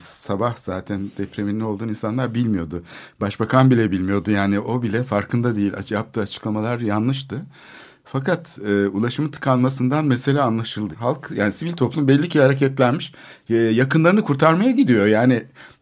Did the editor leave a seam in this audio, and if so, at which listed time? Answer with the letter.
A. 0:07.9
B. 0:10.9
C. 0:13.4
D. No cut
B